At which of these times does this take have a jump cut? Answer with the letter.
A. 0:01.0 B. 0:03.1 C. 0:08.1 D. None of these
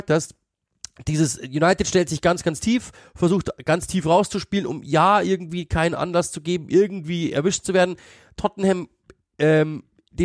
D